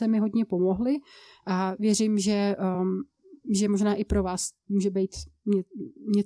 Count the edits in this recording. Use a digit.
0